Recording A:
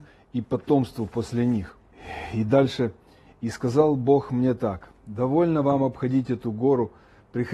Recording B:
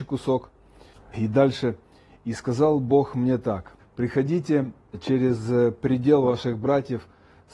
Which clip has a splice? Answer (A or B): B